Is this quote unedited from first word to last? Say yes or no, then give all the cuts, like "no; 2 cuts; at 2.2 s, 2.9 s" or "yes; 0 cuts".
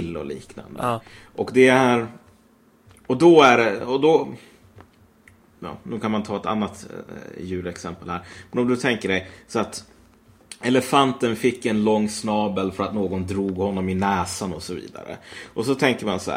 yes; 0 cuts